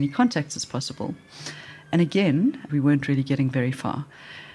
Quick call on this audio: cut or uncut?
cut